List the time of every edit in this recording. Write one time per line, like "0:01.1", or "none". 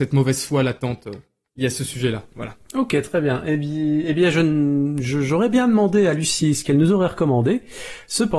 none